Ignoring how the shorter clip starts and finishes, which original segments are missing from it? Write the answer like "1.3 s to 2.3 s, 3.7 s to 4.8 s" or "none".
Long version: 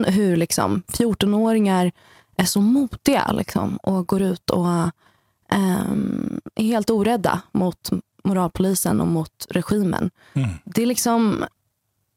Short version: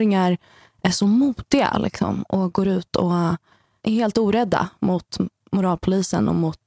5.3 s to 6.5 s